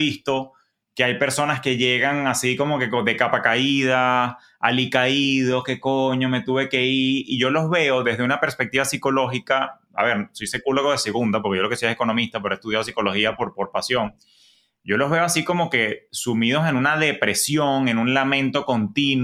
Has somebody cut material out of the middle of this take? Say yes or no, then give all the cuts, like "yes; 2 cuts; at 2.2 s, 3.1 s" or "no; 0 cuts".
no; 0 cuts